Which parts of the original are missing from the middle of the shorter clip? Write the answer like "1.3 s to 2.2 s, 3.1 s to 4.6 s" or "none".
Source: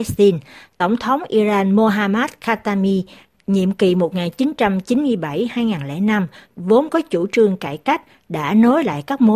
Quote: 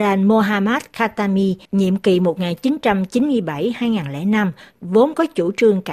3.1 s to 3.4 s